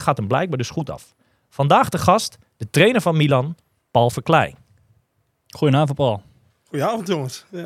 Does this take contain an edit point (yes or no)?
no